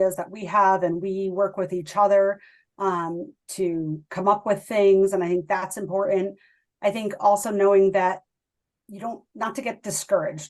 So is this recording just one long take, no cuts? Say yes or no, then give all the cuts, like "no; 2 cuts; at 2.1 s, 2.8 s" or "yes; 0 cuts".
yes; 0 cuts